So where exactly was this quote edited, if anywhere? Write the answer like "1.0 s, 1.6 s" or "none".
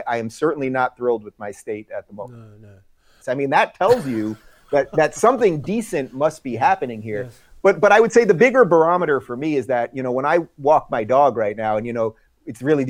3.2 s